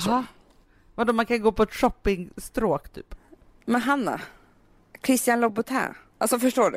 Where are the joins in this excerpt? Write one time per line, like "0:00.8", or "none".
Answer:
none